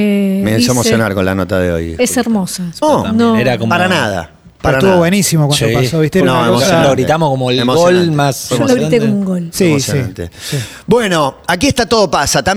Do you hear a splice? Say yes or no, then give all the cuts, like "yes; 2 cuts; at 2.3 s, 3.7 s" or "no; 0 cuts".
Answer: yes; 1 cut; at 2.8 s